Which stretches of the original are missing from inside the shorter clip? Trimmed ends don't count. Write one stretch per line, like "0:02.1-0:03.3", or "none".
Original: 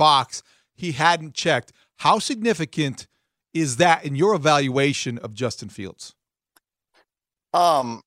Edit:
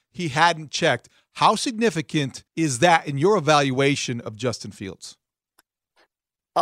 0:03.1-0:03.4